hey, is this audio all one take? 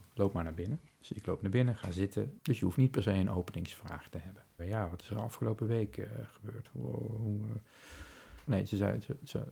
no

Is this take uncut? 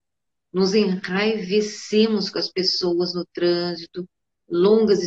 yes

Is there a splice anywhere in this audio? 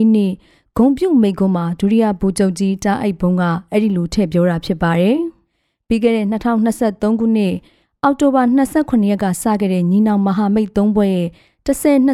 no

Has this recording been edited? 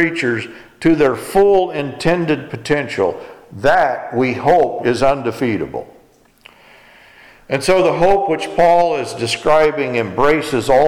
yes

